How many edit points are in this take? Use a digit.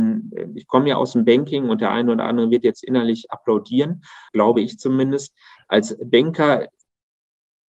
1